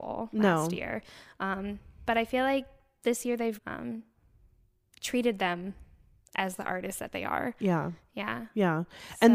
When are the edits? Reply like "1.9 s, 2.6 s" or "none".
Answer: 3.6 s